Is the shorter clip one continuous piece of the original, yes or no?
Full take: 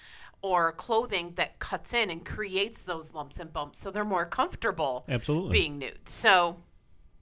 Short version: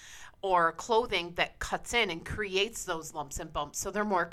yes